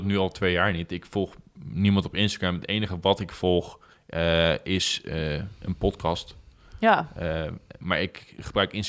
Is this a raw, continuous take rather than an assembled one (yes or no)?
yes